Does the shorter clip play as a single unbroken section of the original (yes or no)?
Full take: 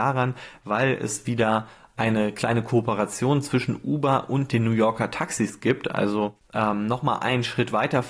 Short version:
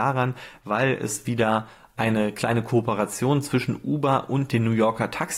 yes